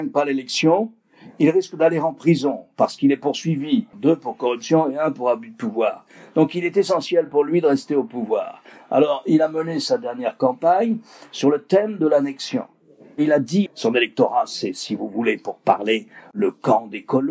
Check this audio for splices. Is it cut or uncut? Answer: cut